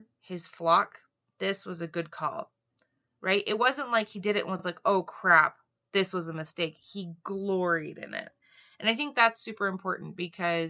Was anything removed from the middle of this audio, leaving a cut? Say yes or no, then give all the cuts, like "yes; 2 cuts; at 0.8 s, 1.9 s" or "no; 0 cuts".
no; 0 cuts